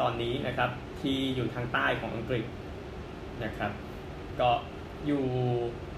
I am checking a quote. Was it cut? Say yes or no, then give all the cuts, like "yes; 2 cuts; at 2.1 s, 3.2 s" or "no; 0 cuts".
yes; 1 cut; at 5.0 s